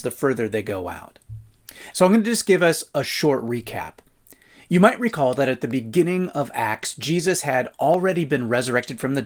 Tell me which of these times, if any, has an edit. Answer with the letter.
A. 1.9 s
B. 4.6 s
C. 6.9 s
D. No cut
A